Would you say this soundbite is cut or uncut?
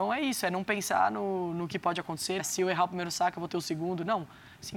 cut